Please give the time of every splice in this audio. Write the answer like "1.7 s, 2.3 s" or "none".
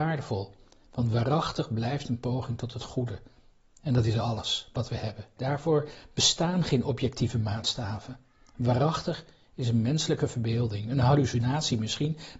5.4 s